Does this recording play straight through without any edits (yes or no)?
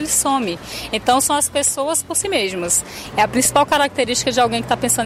no